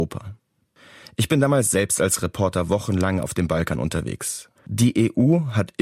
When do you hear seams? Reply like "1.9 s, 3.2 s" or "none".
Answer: 4.6 s